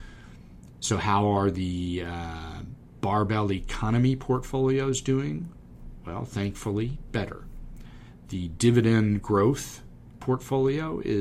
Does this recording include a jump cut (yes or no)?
no